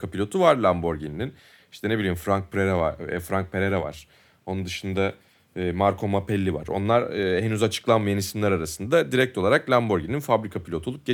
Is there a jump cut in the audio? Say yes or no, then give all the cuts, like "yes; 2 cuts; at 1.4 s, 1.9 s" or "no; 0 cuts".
no; 0 cuts